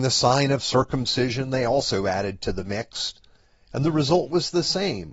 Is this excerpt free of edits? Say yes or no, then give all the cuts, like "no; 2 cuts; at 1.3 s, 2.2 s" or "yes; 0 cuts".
yes; 0 cuts